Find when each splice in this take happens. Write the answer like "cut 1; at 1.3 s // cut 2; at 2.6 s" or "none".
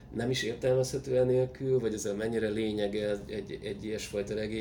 none

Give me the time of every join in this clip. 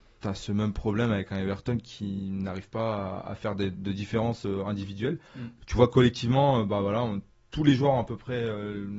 none

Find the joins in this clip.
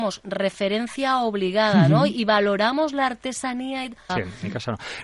cut 1; at 4.1 s

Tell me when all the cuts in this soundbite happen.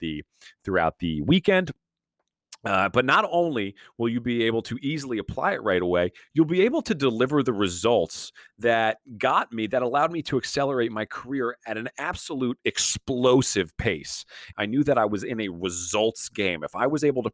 cut 1; at 14.5 s

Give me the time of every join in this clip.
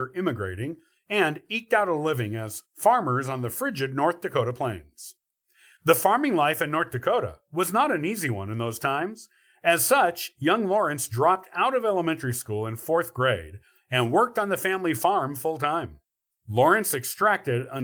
cut 1; at 16.3 s

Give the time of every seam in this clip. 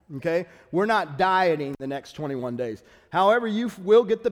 none

